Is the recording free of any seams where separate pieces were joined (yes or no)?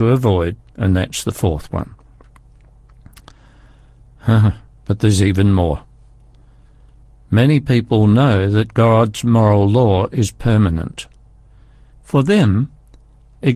no